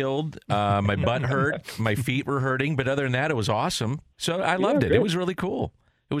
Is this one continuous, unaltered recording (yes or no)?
no